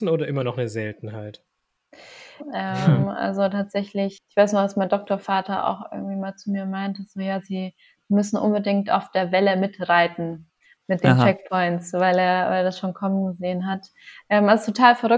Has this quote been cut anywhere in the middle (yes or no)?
yes